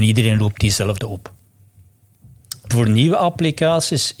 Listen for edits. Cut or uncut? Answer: cut